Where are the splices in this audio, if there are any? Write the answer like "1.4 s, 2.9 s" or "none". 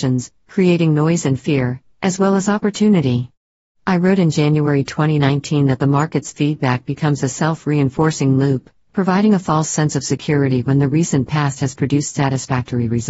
none